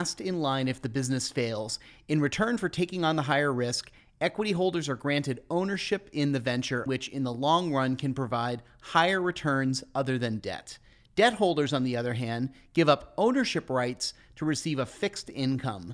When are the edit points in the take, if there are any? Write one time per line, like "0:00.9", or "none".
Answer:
0:06.9